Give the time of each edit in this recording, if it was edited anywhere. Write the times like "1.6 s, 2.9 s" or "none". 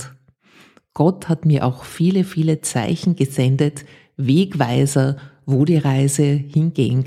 none